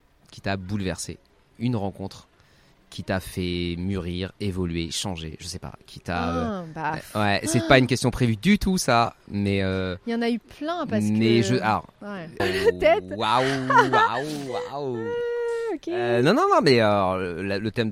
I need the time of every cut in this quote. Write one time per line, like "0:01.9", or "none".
0:12.4